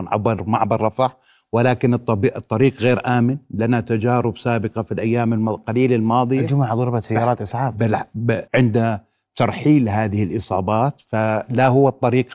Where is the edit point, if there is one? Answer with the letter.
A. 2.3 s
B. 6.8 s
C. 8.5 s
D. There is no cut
C